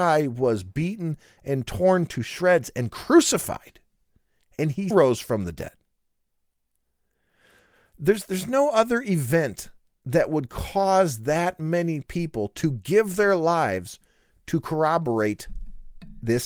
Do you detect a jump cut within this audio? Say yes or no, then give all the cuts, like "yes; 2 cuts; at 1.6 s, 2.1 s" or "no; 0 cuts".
yes; 1 cut; at 4.9 s